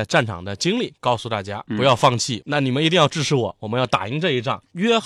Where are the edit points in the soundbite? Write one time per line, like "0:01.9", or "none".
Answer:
0:02.4